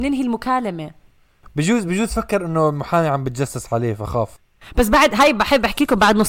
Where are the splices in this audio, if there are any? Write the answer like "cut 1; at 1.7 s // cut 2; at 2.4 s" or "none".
none